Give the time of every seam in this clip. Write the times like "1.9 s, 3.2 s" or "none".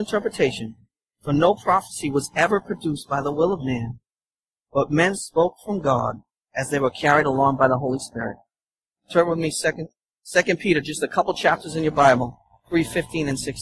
9.0 s